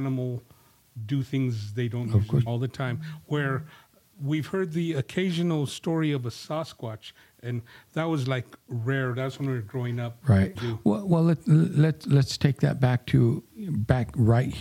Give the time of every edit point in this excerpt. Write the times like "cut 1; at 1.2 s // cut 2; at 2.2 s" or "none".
cut 1; at 2.5 s // cut 2; at 10.6 s